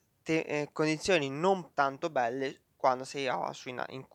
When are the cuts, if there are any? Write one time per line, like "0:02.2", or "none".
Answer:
0:01.7